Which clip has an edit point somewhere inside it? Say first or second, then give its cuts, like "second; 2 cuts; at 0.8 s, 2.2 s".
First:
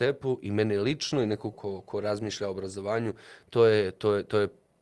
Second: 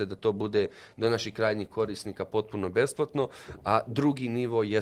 first; 1 cut; at 1.5 s